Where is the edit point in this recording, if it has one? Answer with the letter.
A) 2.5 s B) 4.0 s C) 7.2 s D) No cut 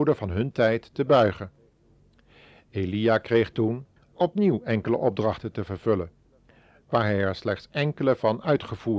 B